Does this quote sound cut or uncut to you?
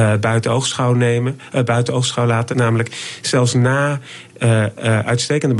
cut